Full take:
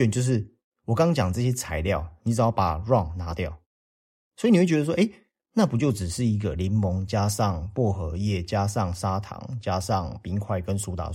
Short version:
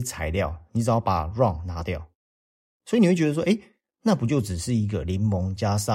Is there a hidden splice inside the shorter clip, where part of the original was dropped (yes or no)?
no